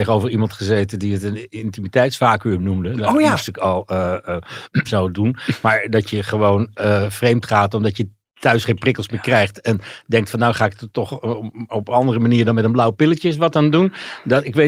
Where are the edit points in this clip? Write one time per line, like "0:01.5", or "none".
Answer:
0:04.8